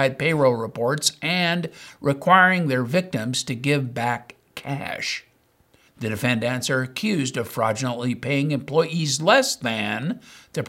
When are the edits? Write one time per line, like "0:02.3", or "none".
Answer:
0:05.9